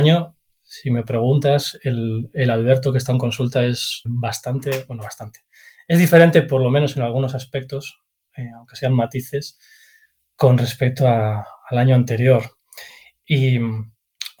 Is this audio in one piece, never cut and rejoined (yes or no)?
no